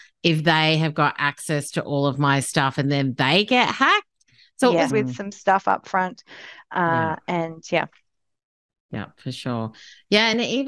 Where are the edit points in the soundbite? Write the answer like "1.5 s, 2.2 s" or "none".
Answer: 4.9 s